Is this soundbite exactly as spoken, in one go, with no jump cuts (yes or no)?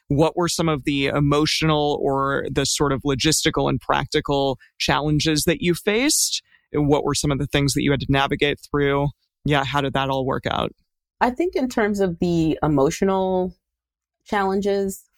yes